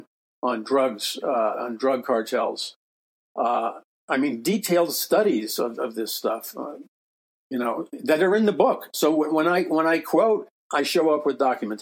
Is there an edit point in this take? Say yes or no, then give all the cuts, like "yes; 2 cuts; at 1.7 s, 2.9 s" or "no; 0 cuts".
no; 0 cuts